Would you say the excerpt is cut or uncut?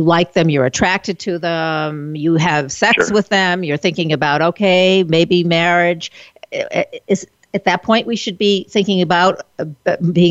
uncut